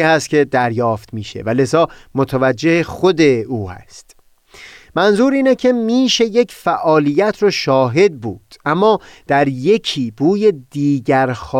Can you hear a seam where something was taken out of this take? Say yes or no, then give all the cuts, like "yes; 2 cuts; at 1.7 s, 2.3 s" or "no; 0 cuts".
no; 0 cuts